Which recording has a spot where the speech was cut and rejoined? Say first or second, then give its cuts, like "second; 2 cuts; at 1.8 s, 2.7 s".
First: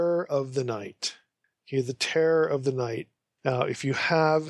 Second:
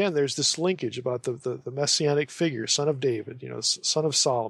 first; 1 cut; at 3.3 s